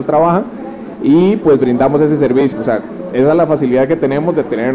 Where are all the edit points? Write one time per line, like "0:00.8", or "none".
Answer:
0:02.5